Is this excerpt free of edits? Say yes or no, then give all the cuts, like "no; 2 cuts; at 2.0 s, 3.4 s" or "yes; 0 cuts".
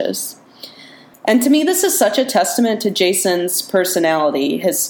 no; 1 cut; at 1.1 s